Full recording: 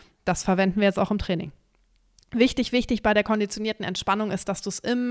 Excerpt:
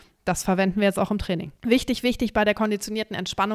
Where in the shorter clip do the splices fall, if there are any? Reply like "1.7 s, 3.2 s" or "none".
1.6 s